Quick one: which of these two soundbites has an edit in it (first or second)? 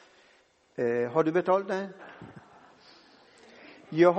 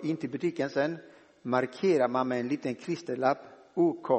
first